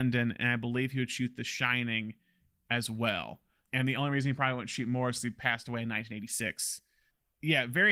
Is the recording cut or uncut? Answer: cut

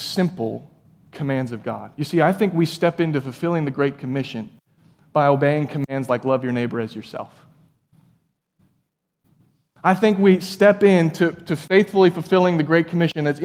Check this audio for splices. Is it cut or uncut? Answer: uncut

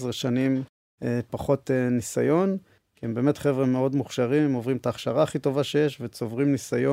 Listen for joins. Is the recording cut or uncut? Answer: uncut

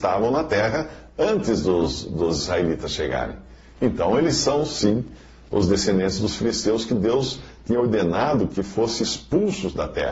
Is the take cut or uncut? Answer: uncut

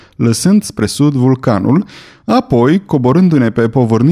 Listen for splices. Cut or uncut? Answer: uncut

